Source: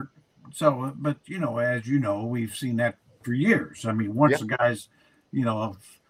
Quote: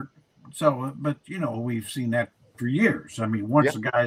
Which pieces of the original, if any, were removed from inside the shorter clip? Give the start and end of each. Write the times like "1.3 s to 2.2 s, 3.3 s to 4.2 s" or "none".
1.5 s to 2.2 s